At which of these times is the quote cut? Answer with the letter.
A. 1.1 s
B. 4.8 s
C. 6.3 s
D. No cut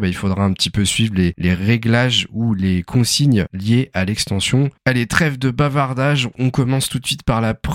B